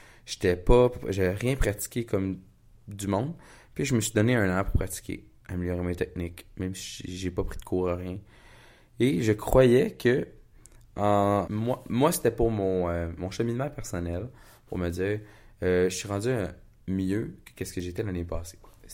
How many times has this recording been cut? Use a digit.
1